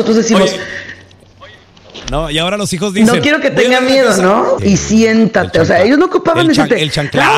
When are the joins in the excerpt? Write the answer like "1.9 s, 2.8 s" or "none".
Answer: 4.6 s